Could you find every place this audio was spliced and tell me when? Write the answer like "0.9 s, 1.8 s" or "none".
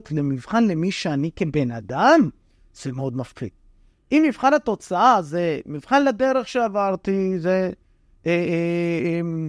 none